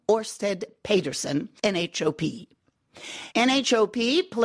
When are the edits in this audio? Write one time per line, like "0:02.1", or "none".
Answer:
0:01.6
0:03.3